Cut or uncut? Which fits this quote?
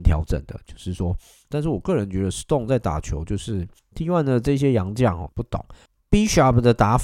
cut